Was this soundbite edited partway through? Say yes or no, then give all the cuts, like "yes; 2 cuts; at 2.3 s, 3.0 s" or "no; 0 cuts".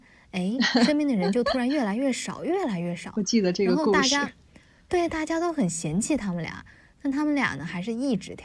no; 0 cuts